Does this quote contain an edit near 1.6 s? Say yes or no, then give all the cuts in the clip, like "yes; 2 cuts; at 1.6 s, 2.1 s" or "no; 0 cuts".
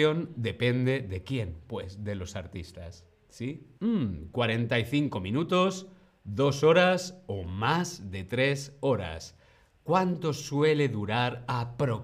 no; 1 cut; at 3.8 s